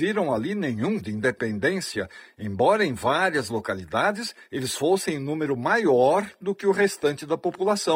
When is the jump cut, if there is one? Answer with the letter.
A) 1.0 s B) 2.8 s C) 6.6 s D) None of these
A